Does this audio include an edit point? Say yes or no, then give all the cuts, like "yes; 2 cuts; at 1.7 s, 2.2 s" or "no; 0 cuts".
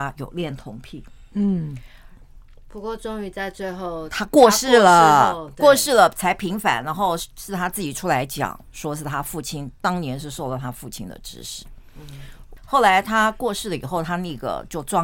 no; 0 cuts